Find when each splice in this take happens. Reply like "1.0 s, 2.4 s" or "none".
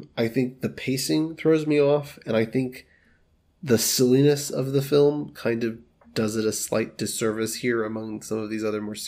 none